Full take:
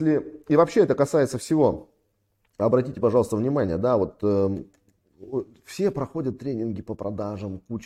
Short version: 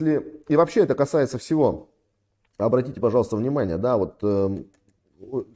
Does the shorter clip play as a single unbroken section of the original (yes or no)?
yes